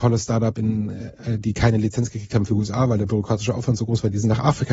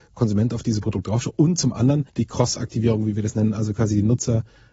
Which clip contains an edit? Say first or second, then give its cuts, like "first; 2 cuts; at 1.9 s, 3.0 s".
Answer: second; 1 cut; at 2.1 s